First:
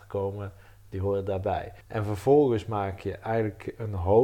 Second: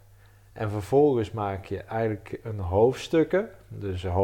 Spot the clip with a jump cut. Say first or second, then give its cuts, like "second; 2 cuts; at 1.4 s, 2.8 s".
first; 1 cut; at 1.8 s